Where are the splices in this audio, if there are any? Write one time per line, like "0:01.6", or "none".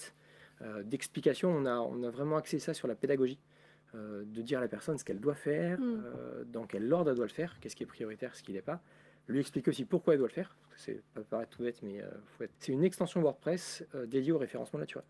0:12.6